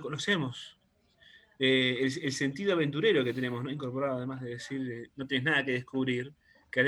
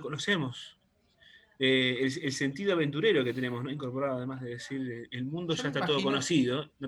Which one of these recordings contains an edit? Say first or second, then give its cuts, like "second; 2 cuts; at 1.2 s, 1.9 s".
first; 1 cut; at 5.1 s